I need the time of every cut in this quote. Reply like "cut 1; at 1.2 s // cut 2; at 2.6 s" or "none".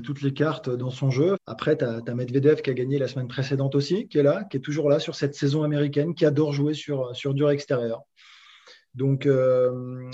cut 1; at 1.3 s